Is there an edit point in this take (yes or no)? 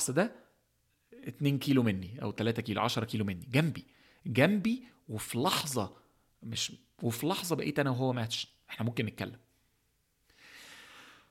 no